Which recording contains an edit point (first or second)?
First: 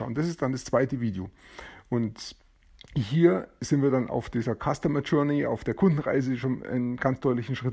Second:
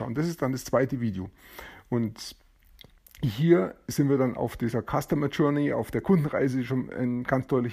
first